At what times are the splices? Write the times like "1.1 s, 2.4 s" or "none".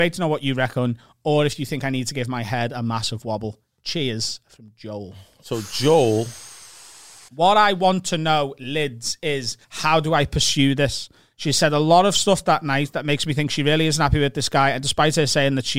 7.3 s, 9.6 s